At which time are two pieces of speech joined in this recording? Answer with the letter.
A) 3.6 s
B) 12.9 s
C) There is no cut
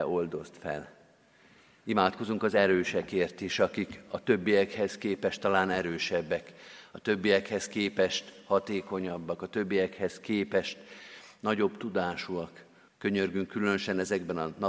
B